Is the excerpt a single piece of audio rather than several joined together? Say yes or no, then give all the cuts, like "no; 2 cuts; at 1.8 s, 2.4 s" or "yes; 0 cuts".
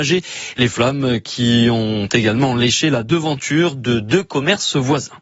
yes; 0 cuts